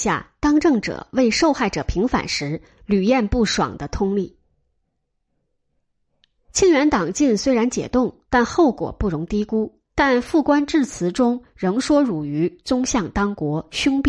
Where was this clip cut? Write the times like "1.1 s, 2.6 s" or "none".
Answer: 9.9 s